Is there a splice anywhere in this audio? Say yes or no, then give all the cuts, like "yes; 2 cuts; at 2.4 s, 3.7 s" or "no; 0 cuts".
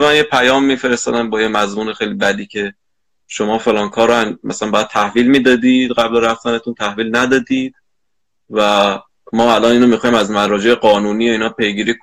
no; 0 cuts